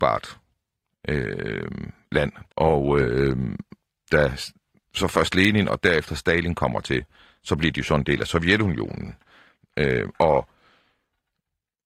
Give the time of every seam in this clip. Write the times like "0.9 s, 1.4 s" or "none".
2.5 s, 4.1 s